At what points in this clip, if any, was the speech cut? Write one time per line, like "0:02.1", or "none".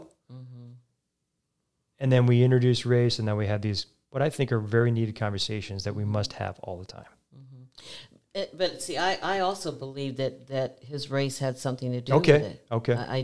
none